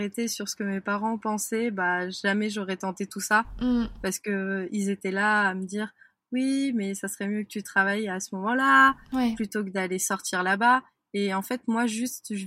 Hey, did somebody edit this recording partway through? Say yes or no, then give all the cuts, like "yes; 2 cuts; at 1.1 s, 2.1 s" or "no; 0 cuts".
no; 0 cuts